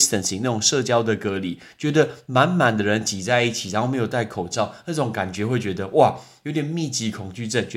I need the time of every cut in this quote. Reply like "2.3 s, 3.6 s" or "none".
none